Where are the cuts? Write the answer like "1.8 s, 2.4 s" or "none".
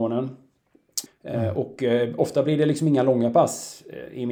1.1 s